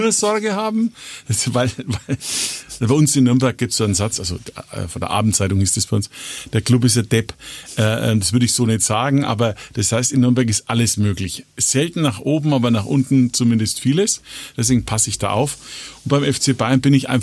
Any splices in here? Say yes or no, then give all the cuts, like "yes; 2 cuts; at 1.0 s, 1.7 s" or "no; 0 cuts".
yes; 1 cut; at 4.1 s